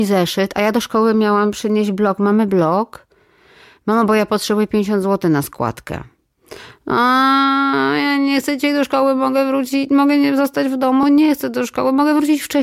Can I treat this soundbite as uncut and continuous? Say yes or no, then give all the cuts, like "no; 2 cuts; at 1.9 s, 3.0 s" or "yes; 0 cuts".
yes; 0 cuts